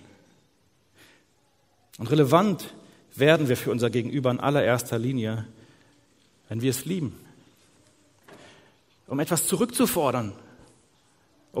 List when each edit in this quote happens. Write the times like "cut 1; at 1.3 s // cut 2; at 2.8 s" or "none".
cut 1; at 1.9 s // cut 2; at 9.0 s